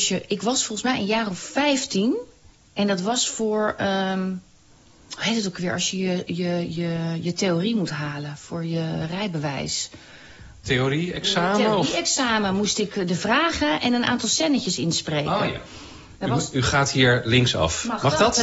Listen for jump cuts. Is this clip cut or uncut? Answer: uncut